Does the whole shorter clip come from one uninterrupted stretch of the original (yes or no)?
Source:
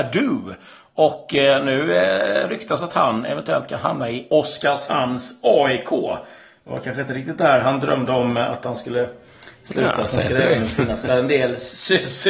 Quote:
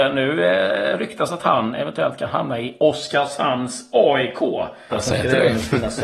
no